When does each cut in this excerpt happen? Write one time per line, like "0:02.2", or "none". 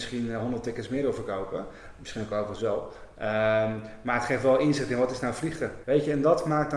0:05.8

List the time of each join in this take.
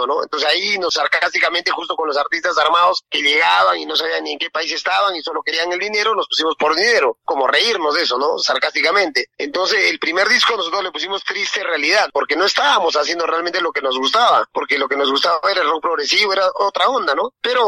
none

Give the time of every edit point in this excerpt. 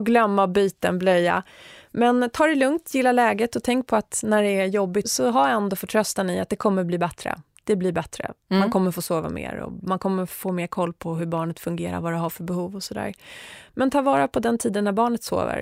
0:05.0
0:08.4

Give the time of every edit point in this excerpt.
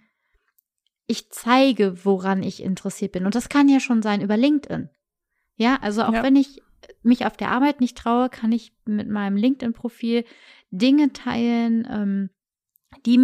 none

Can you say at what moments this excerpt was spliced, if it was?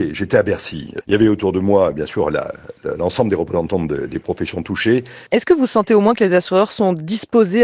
0:01.0
0:05.3

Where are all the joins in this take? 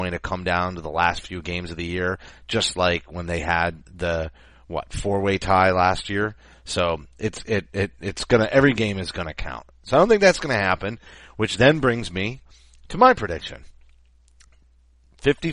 none

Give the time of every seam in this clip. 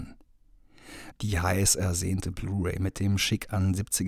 0:01.1

